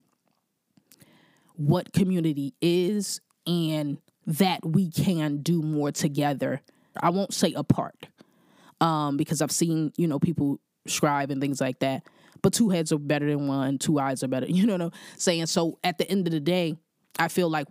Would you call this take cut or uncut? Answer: cut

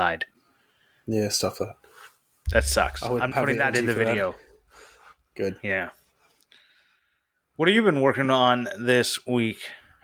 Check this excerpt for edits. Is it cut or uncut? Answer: cut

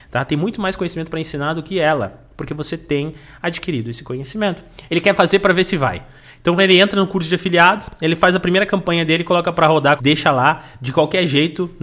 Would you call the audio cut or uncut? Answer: cut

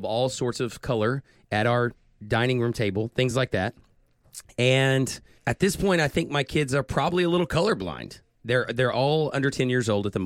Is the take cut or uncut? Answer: uncut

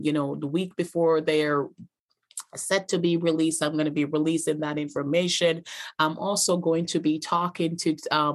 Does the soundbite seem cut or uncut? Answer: uncut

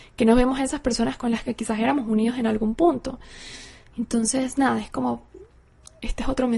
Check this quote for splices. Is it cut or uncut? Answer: uncut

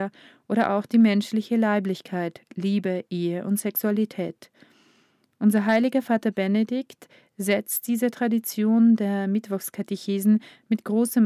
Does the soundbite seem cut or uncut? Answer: uncut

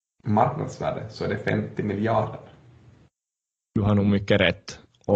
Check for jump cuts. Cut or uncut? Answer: uncut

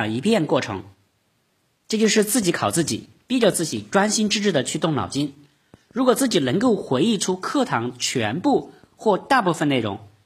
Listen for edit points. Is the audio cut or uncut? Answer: uncut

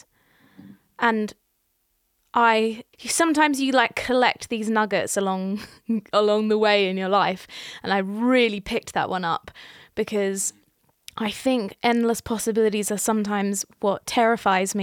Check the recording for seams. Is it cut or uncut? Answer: cut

